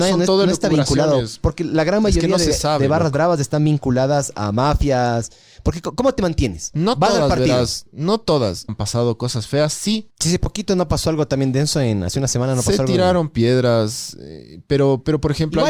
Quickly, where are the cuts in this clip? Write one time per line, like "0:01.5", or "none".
0:06.7
0:08.7
0:10.1